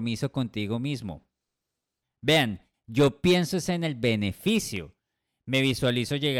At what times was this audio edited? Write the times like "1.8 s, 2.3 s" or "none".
2.7 s